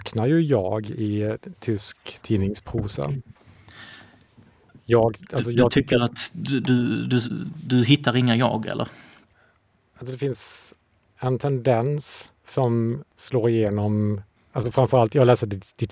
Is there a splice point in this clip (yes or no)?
no